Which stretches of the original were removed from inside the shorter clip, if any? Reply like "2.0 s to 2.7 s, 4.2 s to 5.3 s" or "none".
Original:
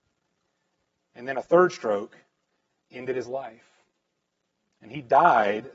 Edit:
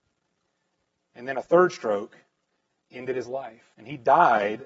3.7 s to 4.8 s